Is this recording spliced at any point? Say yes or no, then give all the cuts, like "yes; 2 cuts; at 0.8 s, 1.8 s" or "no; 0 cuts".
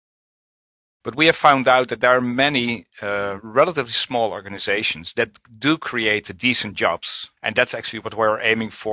yes; 2 cuts; at 1.0 s, 7.4 s